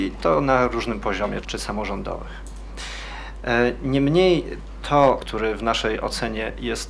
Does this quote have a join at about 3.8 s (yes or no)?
no